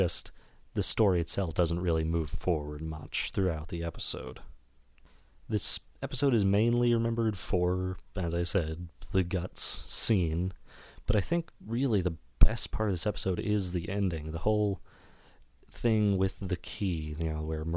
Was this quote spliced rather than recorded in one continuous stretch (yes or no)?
no